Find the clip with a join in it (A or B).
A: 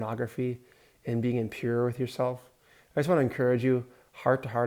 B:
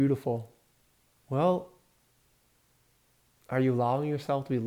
B